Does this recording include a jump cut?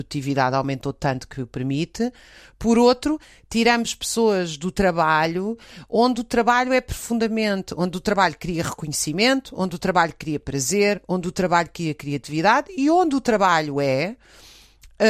no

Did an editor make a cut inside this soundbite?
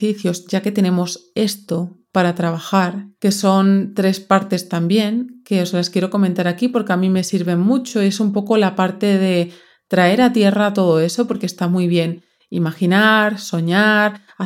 no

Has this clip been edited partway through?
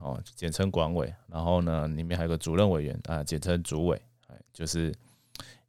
no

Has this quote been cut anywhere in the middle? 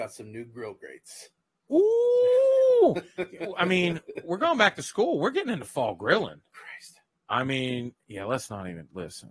no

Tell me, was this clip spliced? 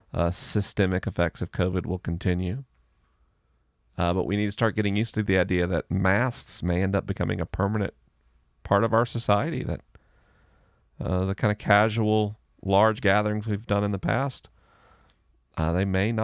no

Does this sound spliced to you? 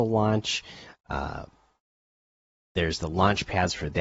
no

